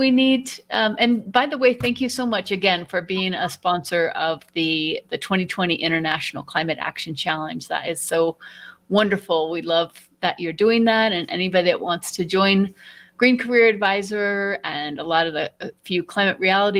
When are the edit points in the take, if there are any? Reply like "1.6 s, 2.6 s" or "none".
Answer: none